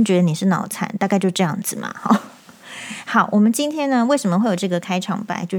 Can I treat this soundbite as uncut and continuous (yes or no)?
yes